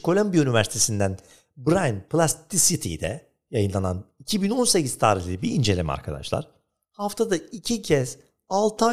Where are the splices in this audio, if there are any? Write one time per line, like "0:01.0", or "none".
none